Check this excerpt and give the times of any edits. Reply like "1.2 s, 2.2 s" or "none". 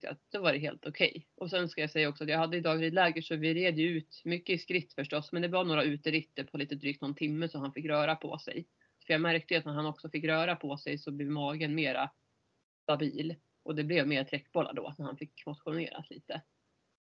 9.0 s